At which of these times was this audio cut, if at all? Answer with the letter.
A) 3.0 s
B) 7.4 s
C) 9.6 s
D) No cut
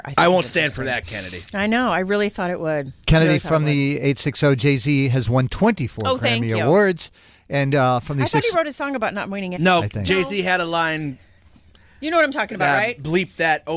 C